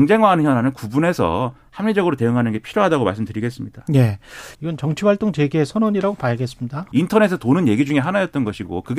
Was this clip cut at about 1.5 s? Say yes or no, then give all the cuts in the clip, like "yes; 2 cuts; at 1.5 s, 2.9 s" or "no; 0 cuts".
no; 2 cuts; at 4.5 s, 6.9 s